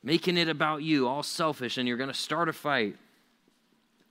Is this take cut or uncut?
uncut